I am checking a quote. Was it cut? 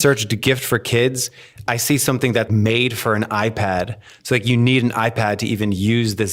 yes; 1 cut; at 2.5 s

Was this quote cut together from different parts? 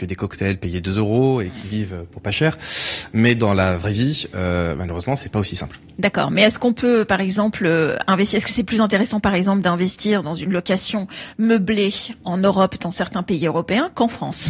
no; 0 cuts

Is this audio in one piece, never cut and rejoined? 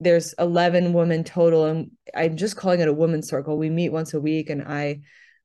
yes; 0 cuts

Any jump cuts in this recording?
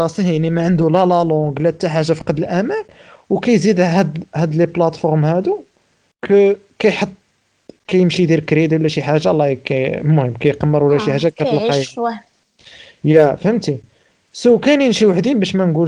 no; 0 cuts

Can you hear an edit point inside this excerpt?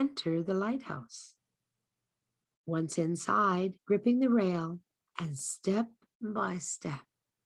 yes; 1 cut; at 3.8 s

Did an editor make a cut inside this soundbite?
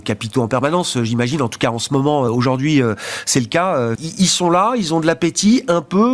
yes; 2 cuts; at 2.3 s, 4.0 s

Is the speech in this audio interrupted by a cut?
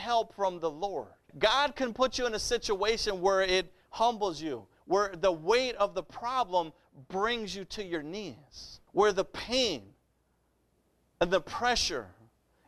yes; 2 cuts; at 1.3 s, 8.9 s

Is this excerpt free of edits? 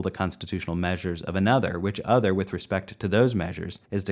yes; 0 cuts

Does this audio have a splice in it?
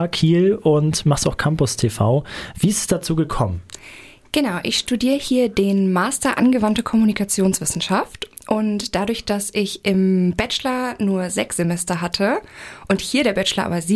no; 0 cuts

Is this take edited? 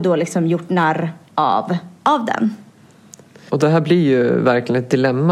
yes; 1 cut; at 3.5 s

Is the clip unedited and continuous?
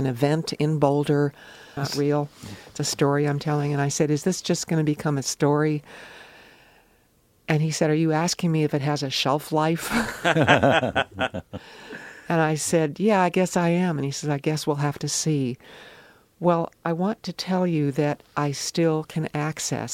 no; 1 cut; at 1.8 s

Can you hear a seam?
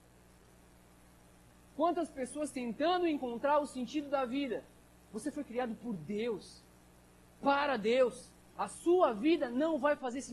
yes; 2 cuts; at 5.0 s, 8.5 s

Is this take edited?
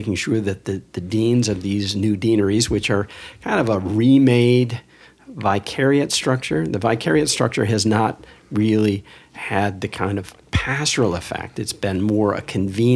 no; 0 cuts

